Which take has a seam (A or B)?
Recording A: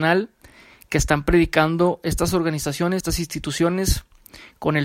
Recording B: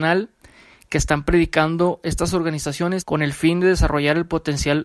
B